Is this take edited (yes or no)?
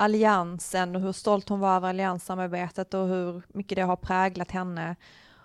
no